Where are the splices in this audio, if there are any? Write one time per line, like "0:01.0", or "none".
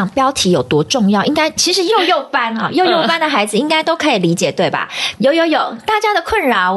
0:01.6
0:05.1